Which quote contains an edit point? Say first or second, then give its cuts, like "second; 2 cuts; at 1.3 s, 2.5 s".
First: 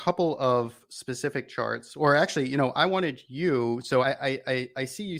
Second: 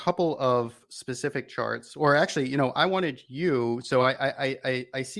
first; 1 cut; at 4.0 s